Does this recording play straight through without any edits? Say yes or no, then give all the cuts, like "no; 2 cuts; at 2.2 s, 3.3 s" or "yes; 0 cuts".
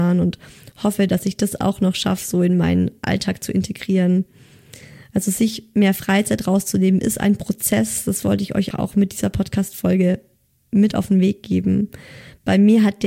no; 1 cut; at 8.7 s